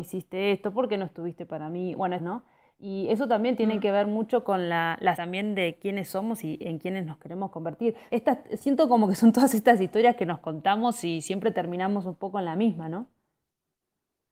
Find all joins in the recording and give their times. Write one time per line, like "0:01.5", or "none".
0:02.2
0:05.1
0:08.1